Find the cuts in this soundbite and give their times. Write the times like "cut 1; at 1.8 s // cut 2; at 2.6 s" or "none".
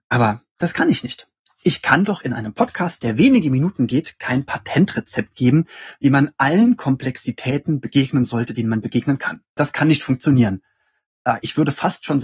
none